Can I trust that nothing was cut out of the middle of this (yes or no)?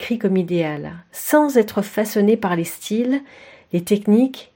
yes